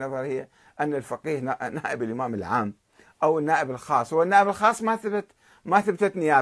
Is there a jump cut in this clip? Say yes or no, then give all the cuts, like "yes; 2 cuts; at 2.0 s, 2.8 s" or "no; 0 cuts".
no; 0 cuts